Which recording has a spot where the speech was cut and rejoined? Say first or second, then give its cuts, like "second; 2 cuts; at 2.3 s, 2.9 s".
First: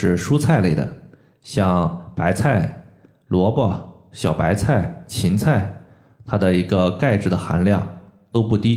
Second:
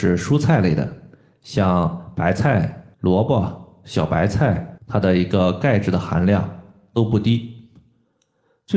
second; 2 cuts; at 2.9 s, 4.8 s